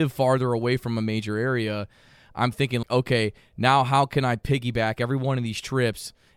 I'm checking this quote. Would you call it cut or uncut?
cut